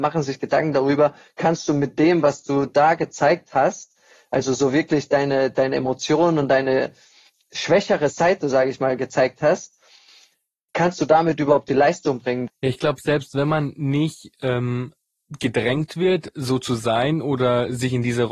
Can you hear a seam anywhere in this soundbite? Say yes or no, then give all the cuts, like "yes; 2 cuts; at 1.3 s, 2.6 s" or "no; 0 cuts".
yes; 1 cut; at 12.5 s